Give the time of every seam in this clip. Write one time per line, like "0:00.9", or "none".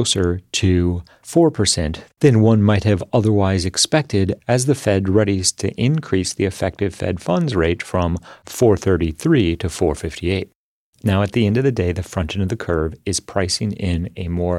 none